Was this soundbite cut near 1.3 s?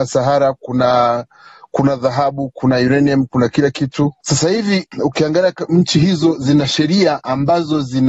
no; 1 cut; at 4.2 s

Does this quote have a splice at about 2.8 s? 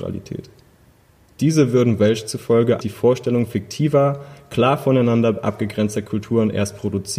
yes; 1 cut; at 2.8 s

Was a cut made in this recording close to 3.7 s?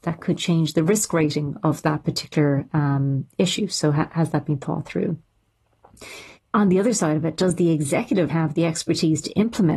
no; 2 cuts; at 6.4 s, 8.3 s

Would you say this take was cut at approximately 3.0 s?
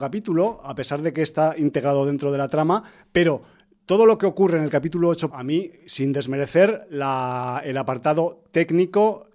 no; 1 cut; at 5.3 s

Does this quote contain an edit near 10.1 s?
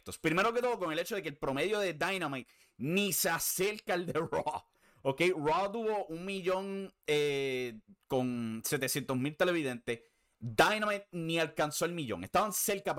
no; 0 cuts

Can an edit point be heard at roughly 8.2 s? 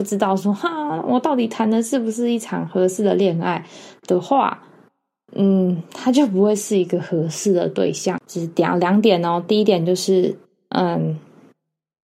yes; 1 cut; at 8.2 s

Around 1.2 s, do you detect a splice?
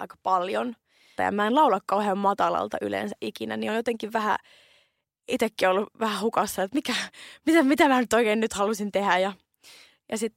yes; 1 cut; at 1.2 s

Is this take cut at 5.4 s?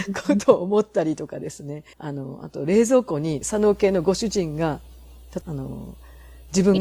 yes; 3 cuts; at 1.9 s, 3.4 s, 5.4 s

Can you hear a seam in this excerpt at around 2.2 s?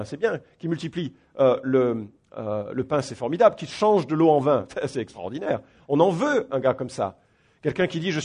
no; 1 cut; at 6.5 s

